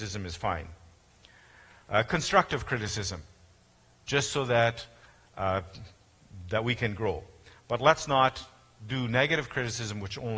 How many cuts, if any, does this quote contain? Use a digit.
0